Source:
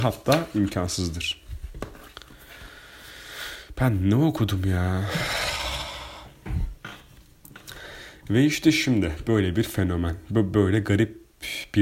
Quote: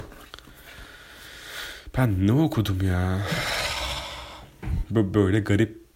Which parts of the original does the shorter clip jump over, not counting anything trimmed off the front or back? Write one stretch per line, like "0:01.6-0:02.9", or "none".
0:06.7-0:10.2